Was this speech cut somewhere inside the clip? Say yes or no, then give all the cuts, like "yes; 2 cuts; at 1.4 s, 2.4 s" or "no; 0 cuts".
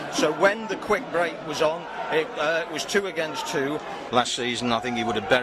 yes; 1 cut; at 4.1 s